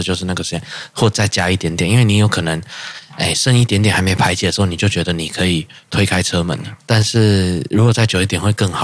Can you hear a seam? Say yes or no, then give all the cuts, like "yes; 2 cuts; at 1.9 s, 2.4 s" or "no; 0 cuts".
yes; 1 cut; at 6.8 s